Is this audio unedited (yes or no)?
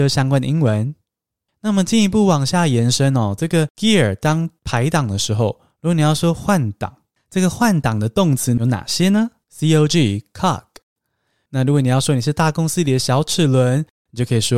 no